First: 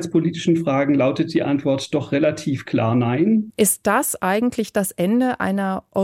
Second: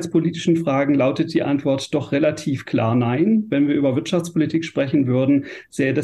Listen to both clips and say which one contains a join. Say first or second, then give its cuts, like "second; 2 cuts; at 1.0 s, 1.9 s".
first; 1 cut; at 3.5 s